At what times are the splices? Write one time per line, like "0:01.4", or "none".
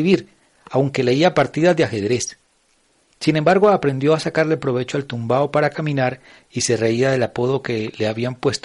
none